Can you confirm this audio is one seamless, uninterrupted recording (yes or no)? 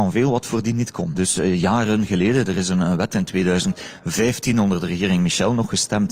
no